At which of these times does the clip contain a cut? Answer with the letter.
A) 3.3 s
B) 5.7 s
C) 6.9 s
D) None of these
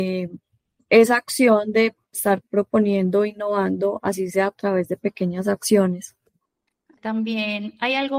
C